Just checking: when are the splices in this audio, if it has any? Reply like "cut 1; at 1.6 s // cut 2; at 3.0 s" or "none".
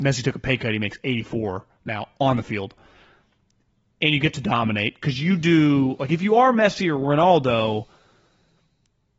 none